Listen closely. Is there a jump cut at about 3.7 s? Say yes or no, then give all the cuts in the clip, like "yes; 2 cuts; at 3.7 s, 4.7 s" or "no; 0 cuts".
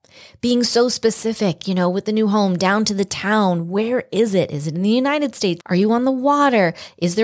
no; 1 cut; at 5.6 s